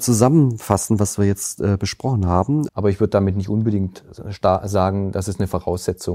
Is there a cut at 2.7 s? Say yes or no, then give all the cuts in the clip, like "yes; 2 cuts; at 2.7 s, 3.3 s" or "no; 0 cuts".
yes; 1 cut; at 2.7 s